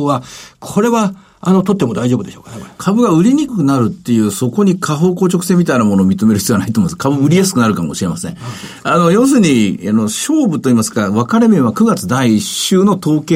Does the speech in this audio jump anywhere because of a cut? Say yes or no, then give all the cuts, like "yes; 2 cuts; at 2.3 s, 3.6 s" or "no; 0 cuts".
yes; 1 cut; at 3.5 s